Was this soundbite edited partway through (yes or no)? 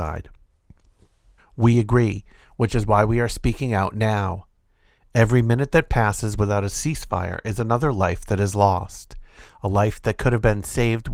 yes